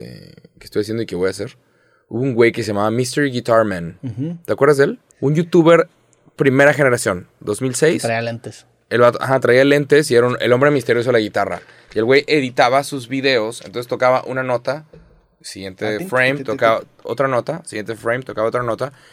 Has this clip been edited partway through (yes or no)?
yes